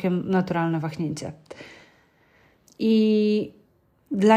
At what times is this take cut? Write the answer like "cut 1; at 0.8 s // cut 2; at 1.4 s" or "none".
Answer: cut 1; at 2.7 s